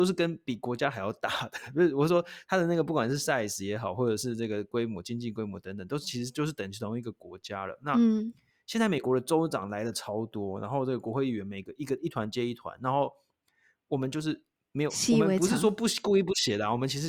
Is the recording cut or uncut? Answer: uncut